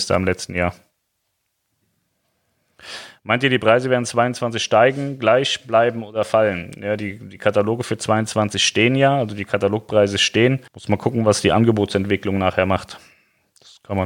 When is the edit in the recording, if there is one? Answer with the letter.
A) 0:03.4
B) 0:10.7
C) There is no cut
B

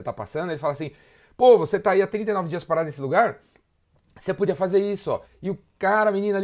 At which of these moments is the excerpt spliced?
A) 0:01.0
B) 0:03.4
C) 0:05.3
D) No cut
C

